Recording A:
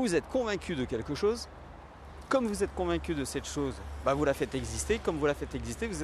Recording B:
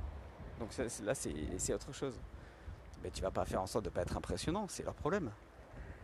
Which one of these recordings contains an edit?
B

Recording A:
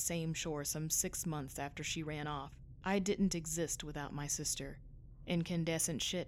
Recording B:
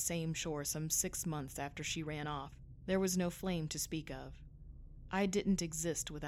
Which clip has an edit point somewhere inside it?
A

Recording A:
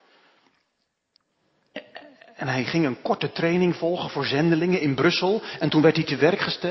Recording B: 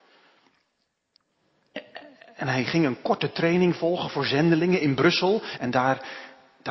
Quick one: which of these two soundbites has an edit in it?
B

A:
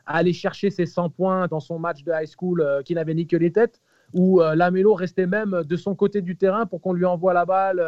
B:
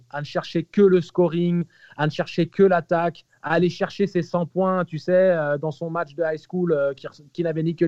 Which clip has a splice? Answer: A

